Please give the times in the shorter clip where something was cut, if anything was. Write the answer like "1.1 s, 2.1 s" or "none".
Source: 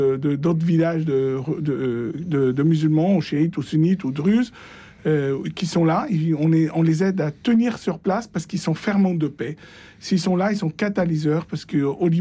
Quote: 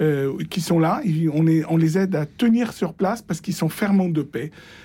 none